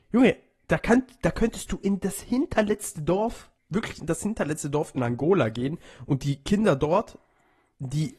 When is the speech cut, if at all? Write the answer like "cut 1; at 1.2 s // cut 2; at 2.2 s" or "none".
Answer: cut 1; at 3.6 s